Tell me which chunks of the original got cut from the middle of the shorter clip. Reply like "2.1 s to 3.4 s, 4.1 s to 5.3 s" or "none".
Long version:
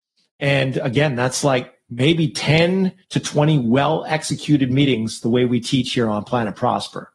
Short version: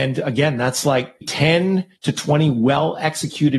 1.8 s to 2.3 s